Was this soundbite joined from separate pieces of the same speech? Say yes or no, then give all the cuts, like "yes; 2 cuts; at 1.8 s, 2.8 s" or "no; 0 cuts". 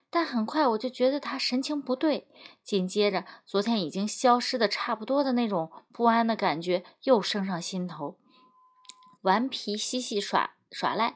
yes; 1 cut; at 9.1 s